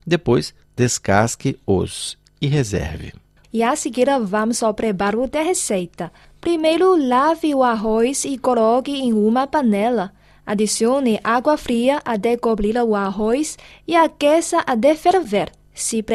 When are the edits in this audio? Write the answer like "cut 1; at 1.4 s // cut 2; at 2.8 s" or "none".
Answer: cut 1; at 3.4 s